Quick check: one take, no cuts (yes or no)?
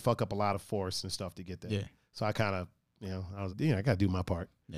no